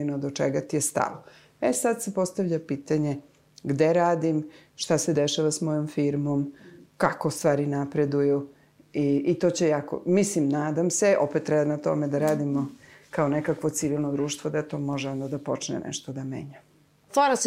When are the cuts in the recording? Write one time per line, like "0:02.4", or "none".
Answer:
none